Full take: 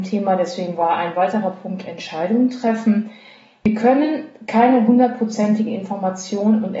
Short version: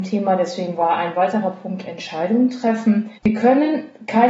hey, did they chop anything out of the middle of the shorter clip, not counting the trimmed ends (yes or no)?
yes